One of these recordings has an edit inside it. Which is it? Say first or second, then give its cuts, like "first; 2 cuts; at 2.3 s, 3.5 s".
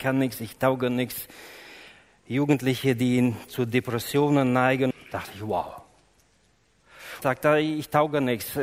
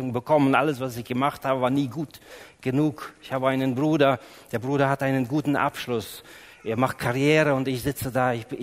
first; 2 cuts; at 4.9 s, 7.2 s